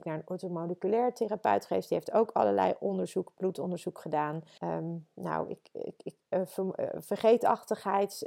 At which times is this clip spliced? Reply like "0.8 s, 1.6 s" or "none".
4.6 s